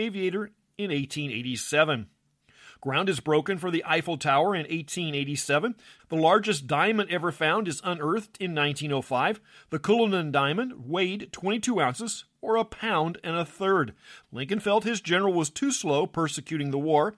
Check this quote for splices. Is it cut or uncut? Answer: cut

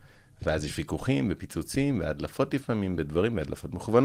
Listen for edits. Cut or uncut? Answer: uncut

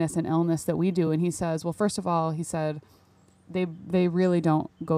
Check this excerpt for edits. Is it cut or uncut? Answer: uncut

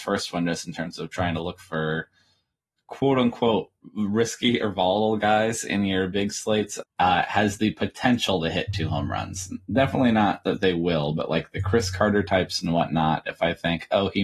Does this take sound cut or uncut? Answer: cut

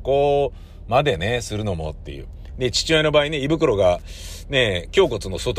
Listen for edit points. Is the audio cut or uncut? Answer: uncut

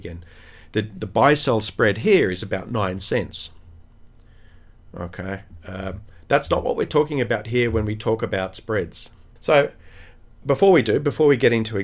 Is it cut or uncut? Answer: cut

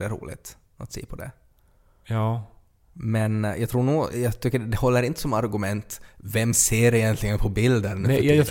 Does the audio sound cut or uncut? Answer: cut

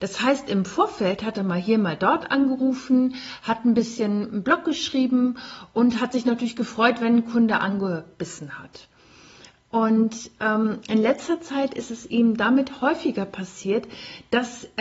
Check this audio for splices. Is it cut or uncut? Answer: uncut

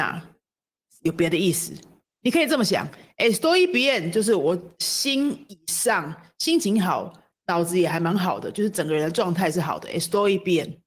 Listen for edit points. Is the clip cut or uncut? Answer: uncut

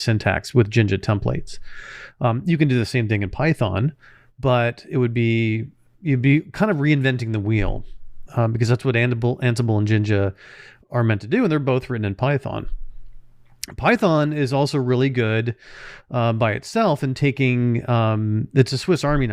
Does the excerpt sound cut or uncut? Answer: uncut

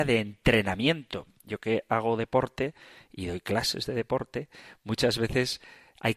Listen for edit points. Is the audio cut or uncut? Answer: uncut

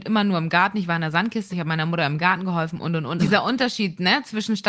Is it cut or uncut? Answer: cut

